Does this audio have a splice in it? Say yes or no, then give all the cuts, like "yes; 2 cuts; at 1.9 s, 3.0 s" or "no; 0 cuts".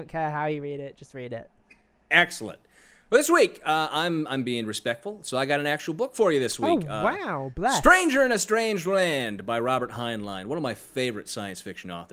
no; 0 cuts